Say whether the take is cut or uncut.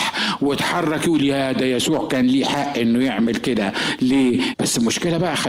cut